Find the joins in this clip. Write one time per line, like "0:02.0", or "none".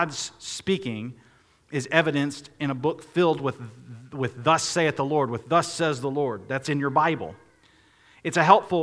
none

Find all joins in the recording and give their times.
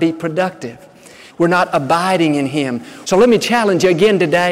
0:01.3
0:03.0

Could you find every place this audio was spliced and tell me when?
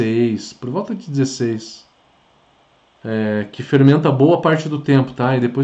0:03.0

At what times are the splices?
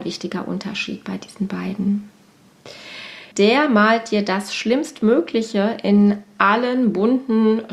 0:03.3

